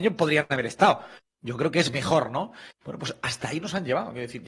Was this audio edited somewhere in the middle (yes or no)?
no